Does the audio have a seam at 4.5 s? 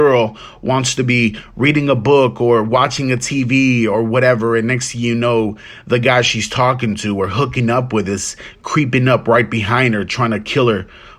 no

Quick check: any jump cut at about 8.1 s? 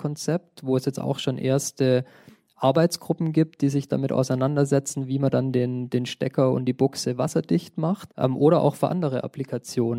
yes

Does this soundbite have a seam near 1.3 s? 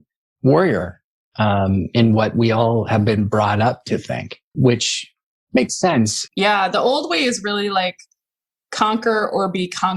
no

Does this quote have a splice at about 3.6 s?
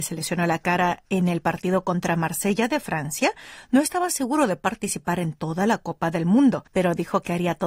no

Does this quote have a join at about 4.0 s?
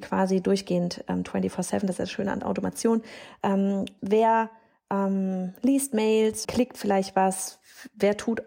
yes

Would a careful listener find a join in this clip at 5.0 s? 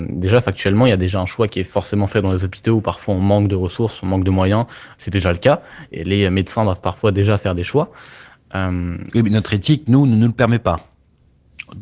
yes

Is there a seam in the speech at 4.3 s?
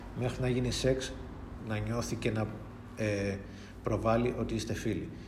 no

